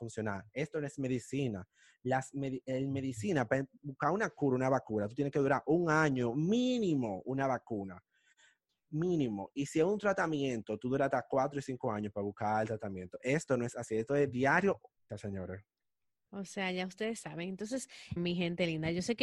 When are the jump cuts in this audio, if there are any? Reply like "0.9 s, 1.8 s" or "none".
15.1 s, 18.2 s